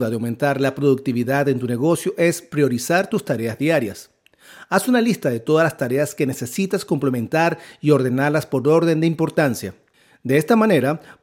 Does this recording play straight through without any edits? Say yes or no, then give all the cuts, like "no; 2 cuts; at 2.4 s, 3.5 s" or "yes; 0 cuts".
yes; 0 cuts